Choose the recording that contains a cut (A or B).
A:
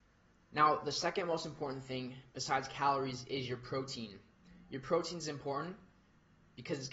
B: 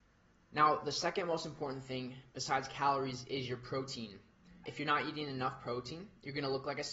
B